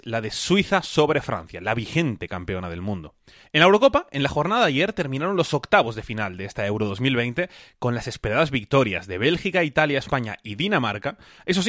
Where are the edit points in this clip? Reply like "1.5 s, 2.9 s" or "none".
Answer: 3.4 s